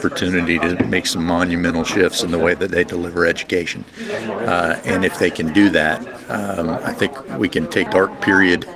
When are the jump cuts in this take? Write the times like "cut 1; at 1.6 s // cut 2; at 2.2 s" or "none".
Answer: cut 1; at 7.9 s